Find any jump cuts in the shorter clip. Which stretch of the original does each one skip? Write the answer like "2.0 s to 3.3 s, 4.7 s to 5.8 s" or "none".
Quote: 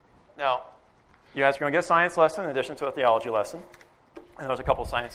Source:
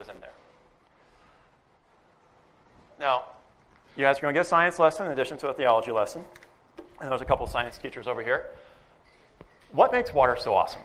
none